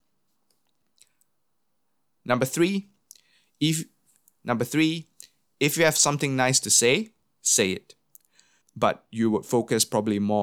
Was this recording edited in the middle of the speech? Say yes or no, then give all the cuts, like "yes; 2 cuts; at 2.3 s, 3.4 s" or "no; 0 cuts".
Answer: yes; 1 cut; at 8.6 s